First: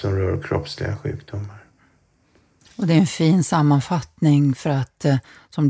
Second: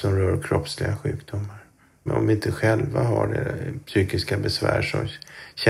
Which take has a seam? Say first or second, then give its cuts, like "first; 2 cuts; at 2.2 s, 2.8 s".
second; 1 cut; at 2.1 s